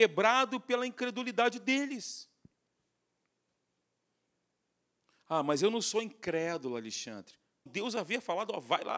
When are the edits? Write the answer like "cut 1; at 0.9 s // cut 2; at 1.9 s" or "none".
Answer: cut 1; at 7.7 s